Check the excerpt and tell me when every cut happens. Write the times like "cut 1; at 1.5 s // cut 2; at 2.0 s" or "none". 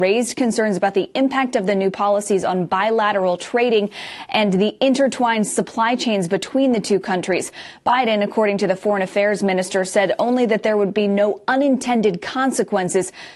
none